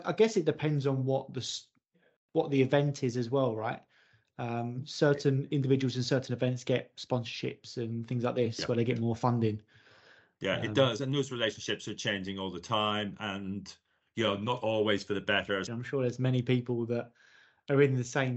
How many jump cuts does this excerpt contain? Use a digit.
1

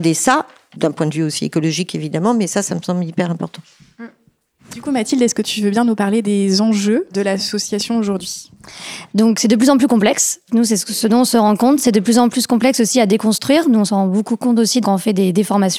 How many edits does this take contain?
0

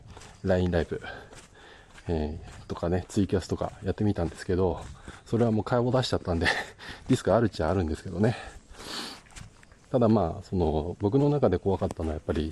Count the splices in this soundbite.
1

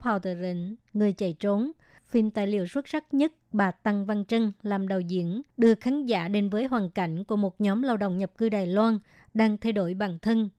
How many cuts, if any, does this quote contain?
2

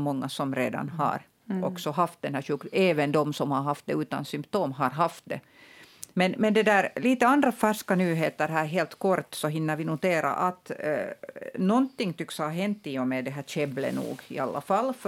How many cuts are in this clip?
1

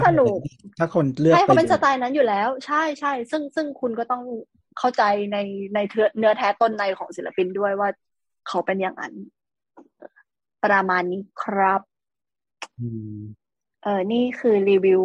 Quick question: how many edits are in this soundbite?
1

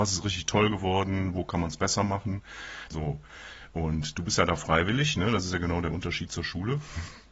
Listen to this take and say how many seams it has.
1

